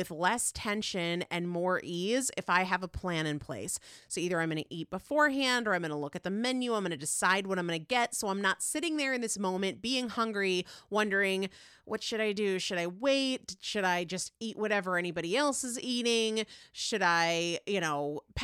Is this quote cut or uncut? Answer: uncut